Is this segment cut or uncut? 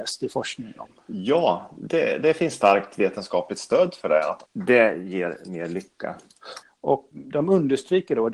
cut